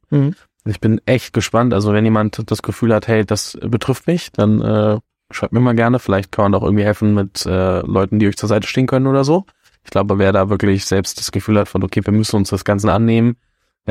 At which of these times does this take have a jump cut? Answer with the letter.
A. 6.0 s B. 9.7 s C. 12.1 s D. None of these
D